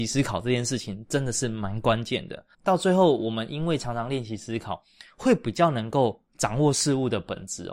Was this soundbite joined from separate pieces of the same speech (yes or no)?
yes